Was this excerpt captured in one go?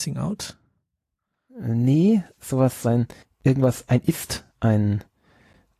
no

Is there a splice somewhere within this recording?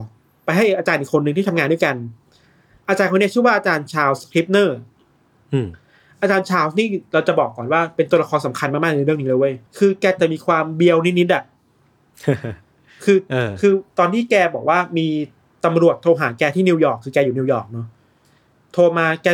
yes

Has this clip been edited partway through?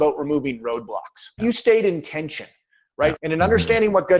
yes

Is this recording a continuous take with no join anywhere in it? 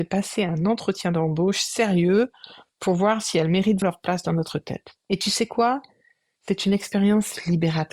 no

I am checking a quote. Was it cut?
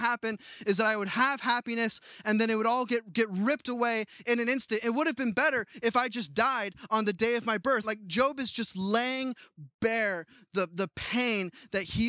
yes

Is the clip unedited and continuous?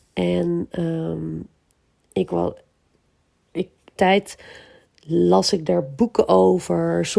no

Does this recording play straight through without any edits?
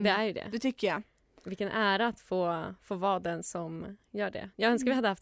yes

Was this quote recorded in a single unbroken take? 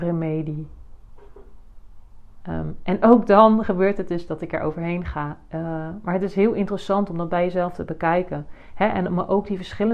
no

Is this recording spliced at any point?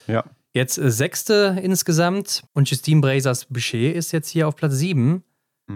yes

